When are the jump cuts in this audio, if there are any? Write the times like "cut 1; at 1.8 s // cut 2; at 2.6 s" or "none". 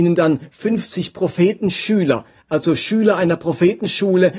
none

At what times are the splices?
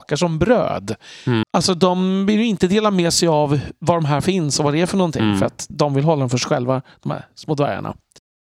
cut 1; at 1.4 s

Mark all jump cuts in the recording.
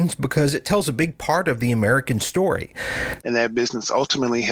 cut 1; at 3.2 s

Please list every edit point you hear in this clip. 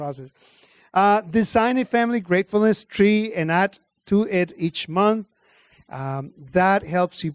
cut 1; at 5.7 s

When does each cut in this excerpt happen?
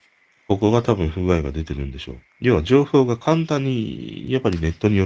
cut 1; at 2.3 s

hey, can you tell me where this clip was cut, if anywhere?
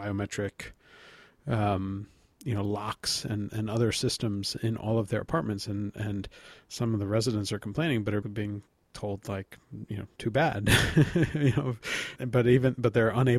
cut 1; at 8.2 s // cut 2; at 12.2 s

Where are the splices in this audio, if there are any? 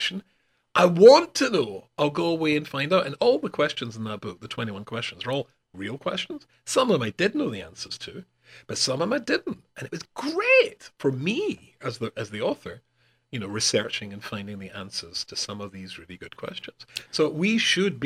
none

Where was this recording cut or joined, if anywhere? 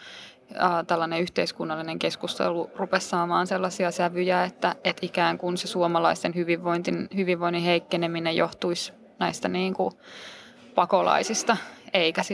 none

